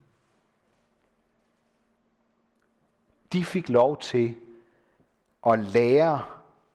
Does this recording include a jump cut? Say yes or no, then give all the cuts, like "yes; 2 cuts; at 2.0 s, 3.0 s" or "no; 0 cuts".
no; 0 cuts